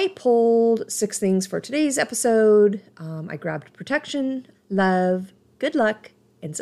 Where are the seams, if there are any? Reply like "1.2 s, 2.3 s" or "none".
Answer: 4.5 s